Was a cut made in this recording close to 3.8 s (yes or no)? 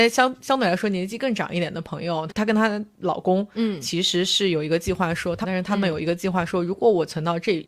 no